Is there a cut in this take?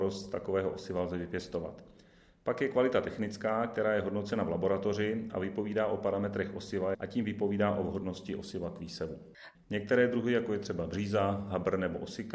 yes; 2 cuts; at 6.9 s, 9.5 s

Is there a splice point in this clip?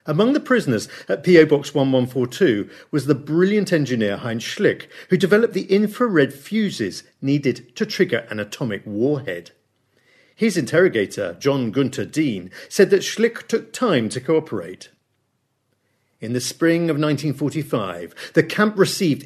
no; 0 cuts

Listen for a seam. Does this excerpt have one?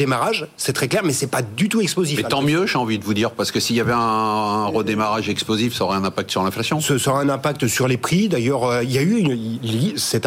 no; 0 cuts

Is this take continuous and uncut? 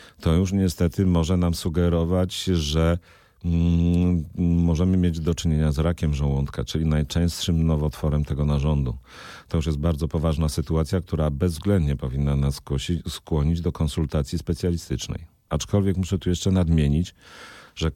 no; 1 cut; at 15.5 s

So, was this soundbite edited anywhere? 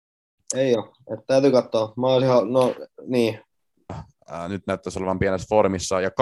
yes; 1 cut; at 3.9 s

